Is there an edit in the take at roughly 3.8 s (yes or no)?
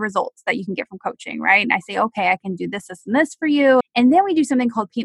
yes